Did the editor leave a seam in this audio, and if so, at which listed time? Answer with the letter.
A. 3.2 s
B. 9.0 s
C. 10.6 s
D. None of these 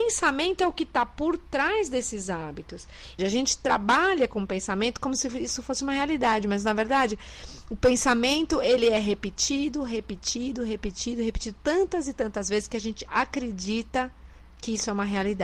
A